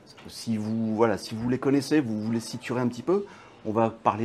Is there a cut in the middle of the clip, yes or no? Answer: no